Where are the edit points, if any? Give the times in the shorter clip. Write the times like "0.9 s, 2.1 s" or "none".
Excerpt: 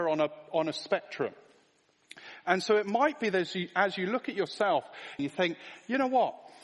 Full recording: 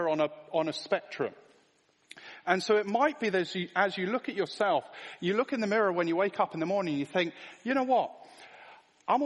5.2 s

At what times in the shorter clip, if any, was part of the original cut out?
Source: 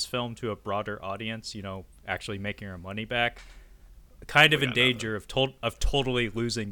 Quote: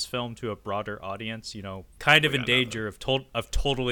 2.0 s

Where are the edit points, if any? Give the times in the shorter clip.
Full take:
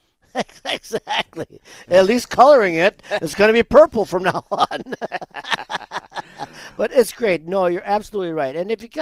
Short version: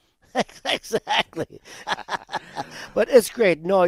1.8 s

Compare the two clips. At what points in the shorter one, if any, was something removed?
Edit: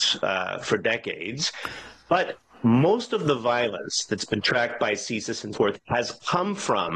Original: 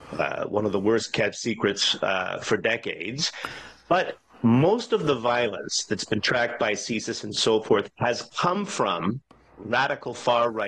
5.5 s

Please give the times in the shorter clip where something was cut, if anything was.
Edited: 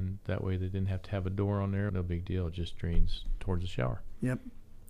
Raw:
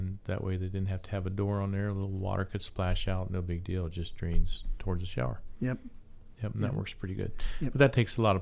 1.9 s

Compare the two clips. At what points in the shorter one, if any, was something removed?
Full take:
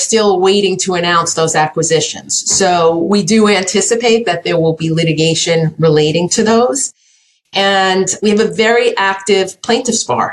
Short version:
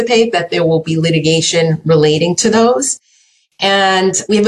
none

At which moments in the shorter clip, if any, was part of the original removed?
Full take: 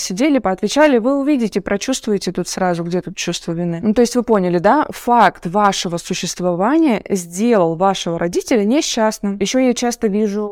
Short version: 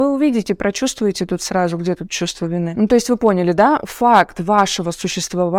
none

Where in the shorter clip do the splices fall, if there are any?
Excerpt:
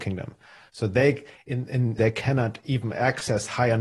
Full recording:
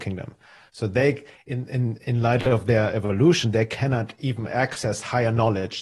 2.0 s

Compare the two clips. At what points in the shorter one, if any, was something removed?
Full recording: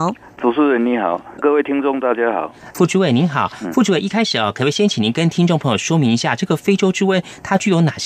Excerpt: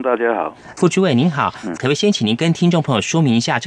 1.8 s

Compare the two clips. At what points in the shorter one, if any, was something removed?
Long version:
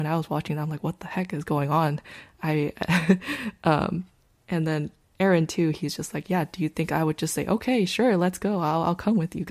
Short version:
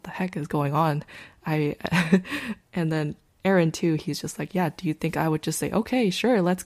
2.6 s

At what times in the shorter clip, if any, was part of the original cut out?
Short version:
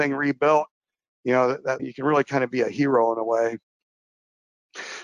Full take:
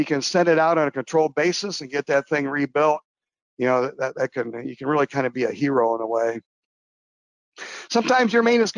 1.8 s

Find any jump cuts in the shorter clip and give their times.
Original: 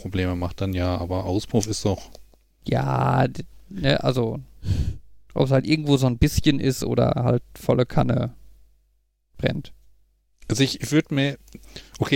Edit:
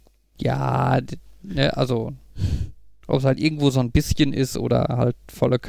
none

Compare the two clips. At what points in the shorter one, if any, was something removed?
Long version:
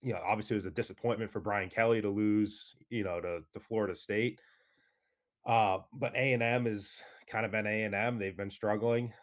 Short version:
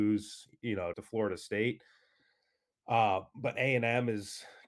0.9 s

